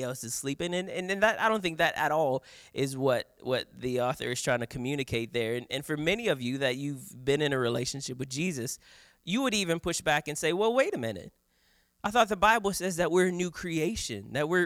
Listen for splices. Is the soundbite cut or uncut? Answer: uncut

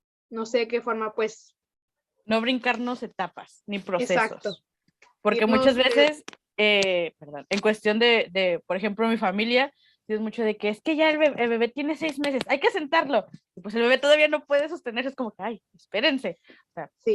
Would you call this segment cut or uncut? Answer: uncut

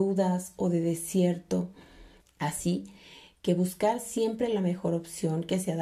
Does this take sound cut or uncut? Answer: cut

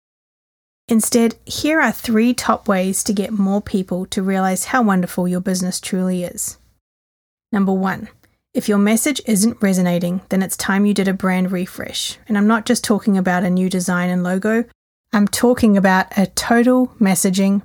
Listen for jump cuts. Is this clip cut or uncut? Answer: uncut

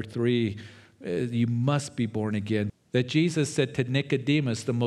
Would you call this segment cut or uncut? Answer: cut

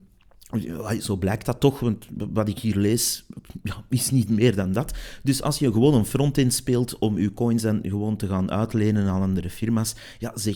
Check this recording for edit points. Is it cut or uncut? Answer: uncut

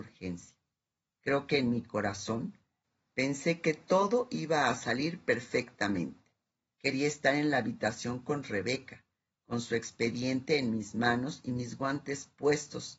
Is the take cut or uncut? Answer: cut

